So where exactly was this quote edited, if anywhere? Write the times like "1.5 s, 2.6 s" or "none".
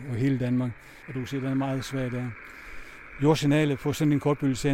1.0 s